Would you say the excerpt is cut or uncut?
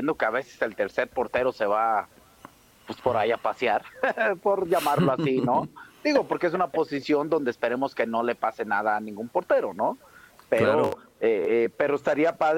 uncut